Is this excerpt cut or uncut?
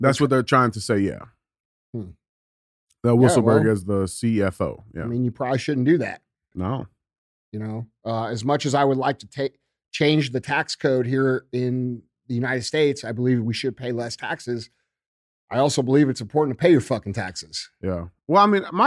cut